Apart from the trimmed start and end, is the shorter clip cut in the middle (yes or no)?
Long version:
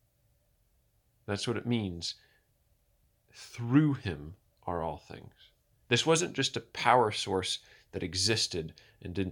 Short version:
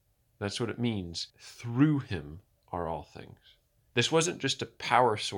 yes